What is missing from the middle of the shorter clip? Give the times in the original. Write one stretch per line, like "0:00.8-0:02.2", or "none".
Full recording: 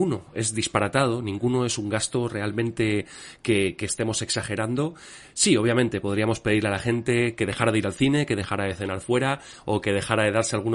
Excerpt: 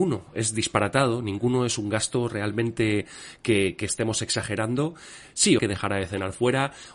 0:05.6-0:08.3